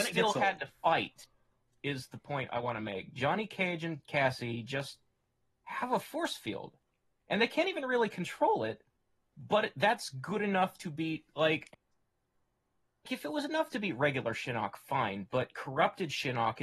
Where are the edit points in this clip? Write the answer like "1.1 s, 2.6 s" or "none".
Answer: 13.1 s